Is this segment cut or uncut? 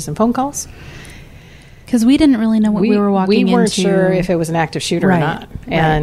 uncut